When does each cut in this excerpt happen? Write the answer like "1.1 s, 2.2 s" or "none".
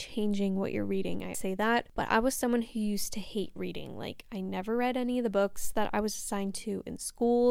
1.3 s